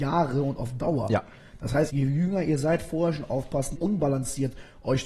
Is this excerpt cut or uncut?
cut